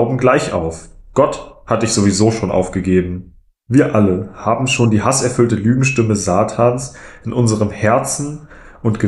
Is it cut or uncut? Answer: uncut